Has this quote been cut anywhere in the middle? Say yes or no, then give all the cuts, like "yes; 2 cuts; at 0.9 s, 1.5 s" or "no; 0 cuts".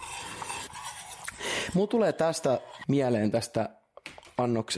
yes; 1 cut; at 2.8 s